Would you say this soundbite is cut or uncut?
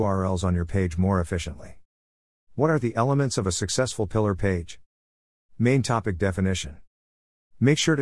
uncut